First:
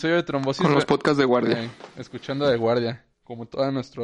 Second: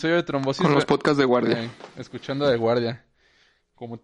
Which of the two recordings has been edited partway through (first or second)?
first